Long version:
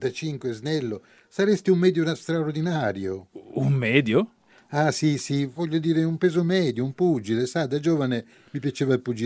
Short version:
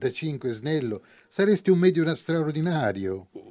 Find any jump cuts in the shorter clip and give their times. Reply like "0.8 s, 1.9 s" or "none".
none